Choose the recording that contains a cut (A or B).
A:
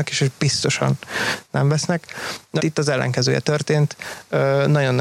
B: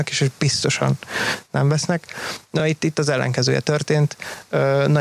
A